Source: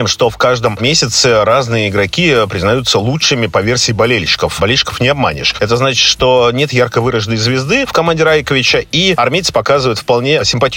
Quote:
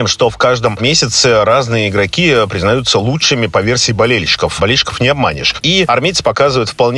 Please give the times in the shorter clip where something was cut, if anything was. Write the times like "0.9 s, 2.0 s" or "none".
5.6 s

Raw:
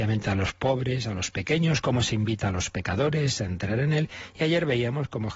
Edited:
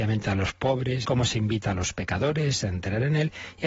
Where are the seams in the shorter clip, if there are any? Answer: 1.0 s

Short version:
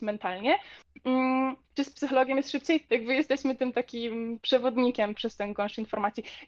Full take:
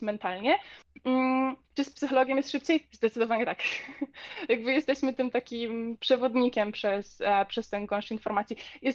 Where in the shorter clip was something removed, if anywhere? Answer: 2.9 s, 5.1 s

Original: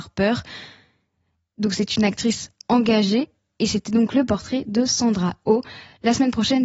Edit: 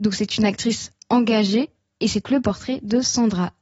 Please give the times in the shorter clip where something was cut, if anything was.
2.2 s

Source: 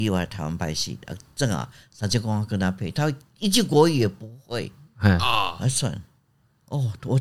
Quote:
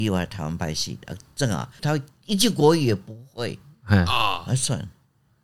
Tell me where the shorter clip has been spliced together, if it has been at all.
1.8 s

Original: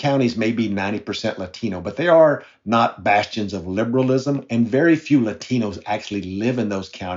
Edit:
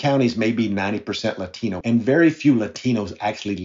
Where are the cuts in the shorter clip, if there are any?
1.8 s

